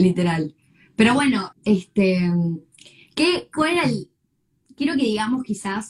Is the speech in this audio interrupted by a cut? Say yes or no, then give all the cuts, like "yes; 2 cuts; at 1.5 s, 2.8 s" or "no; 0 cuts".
yes; 1 cut; at 1.5 s